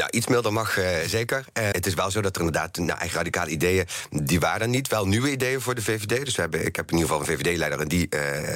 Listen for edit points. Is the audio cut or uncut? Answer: cut